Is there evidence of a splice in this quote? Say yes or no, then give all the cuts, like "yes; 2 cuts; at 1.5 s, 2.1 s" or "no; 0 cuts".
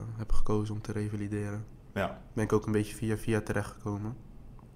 no; 0 cuts